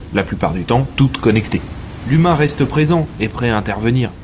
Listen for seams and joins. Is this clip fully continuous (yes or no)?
yes